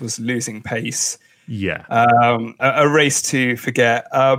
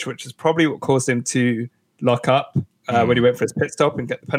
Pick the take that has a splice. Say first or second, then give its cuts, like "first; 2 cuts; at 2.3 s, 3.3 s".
first; 1 cut; at 2.6 s